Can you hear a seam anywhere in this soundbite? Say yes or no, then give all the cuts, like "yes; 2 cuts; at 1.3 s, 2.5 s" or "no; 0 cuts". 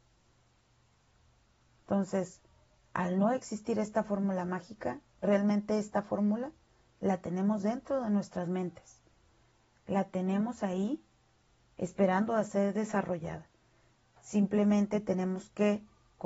no; 0 cuts